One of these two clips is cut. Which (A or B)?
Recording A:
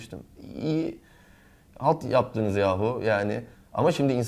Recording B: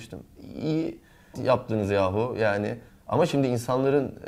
B